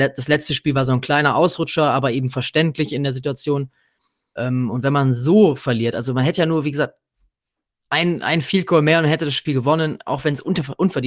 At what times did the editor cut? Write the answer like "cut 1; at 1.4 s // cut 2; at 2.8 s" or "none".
cut 1; at 4.4 s